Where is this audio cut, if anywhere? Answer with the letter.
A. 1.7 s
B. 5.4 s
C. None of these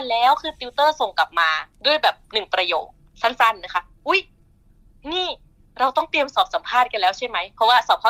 A